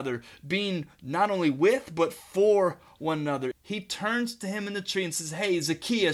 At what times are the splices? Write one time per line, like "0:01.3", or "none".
0:03.5